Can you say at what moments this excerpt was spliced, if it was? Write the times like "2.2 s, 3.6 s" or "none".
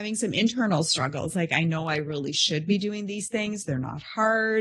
none